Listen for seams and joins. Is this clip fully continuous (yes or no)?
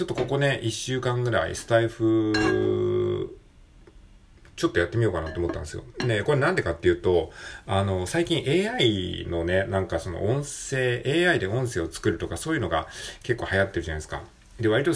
yes